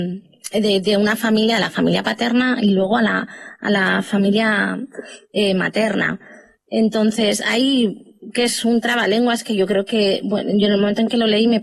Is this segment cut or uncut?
uncut